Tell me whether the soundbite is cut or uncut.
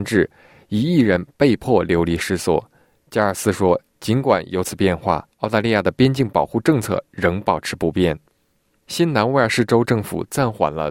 uncut